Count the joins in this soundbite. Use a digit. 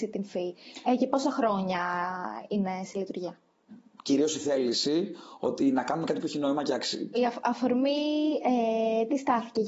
2